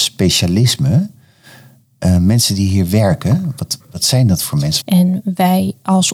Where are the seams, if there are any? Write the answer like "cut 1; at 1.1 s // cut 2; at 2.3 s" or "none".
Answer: cut 1; at 3.8 s // cut 2; at 4.8 s